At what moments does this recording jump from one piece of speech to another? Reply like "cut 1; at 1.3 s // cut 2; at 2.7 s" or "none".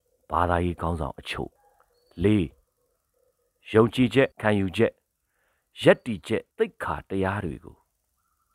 cut 1; at 1.6 s // cut 2; at 4.3 s // cut 3; at 6.5 s